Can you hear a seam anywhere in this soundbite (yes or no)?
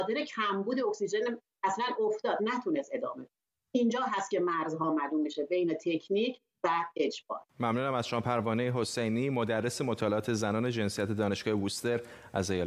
yes